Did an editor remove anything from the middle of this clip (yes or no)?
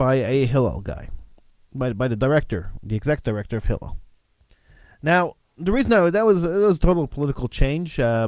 no